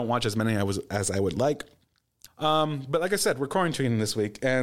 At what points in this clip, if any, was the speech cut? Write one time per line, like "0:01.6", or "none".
0:02.3